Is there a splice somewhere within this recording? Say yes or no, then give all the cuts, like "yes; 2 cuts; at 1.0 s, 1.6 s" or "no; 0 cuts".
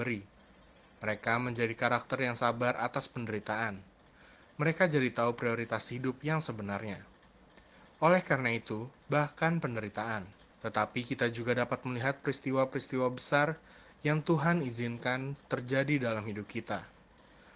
yes; 2 cuts; at 9.0 s, 10.5 s